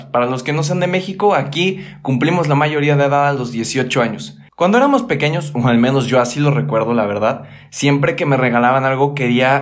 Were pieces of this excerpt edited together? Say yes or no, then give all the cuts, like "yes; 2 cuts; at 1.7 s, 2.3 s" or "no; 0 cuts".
yes; 1 cut; at 4.5 s